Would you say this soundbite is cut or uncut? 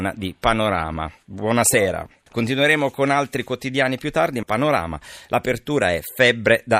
cut